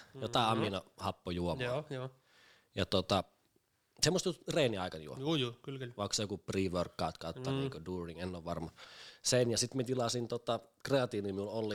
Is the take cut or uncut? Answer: uncut